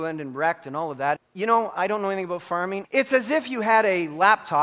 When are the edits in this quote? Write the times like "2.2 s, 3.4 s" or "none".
1.2 s, 2.8 s